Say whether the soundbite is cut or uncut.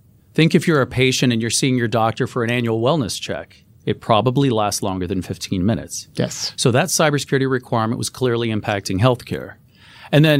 uncut